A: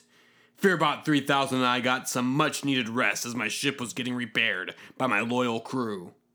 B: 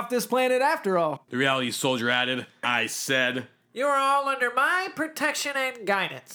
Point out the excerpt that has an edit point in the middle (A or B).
B